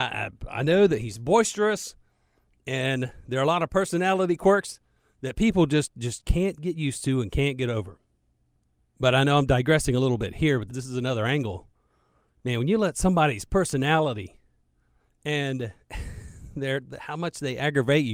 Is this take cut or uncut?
cut